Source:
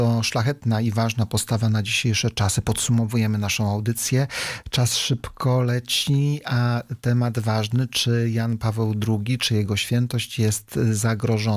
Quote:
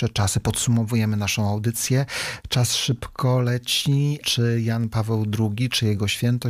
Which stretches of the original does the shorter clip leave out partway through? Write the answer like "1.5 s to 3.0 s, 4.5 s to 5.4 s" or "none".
6.4 s to 7.9 s